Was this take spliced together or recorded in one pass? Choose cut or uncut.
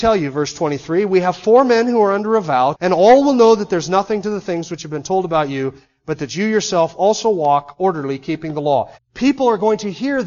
cut